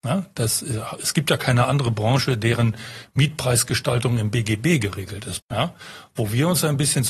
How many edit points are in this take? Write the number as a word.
one